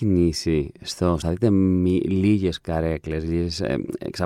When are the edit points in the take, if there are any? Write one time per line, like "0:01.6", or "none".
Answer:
0:01.2